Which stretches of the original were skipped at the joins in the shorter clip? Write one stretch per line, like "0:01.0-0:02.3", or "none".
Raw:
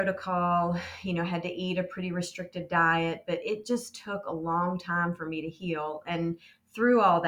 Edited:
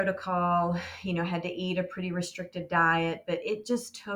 none